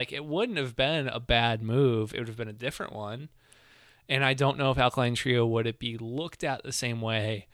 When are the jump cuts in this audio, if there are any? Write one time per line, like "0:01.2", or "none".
none